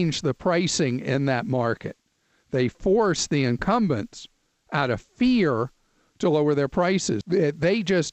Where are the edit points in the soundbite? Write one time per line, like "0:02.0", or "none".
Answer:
0:07.2